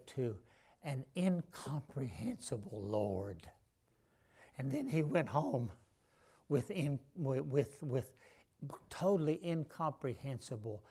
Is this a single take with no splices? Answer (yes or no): yes